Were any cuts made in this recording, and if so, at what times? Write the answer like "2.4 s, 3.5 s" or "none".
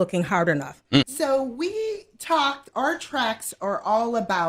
1.0 s